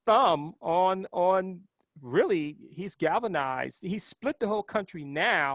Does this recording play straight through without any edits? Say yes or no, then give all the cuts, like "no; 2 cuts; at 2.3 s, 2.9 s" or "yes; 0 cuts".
yes; 0 cuts